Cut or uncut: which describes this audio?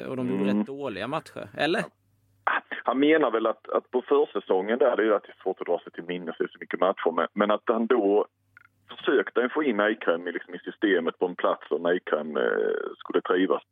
uncut